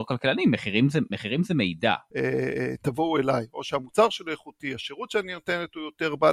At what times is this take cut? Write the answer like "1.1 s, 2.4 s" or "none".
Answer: 2.1 s